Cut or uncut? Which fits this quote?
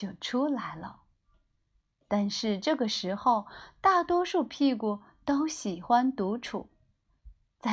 uncut